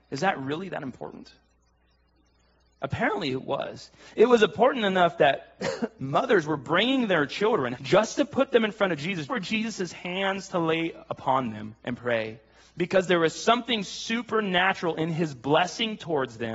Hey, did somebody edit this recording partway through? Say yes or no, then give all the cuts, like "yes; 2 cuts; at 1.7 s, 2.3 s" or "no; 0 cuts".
yes; 3 cuts; at 7.7 s, 9.3 s, 11.8 s